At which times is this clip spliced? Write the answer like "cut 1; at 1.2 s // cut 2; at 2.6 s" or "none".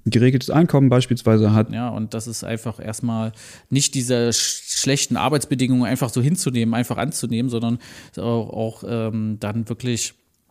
cut 1; at 1.7 s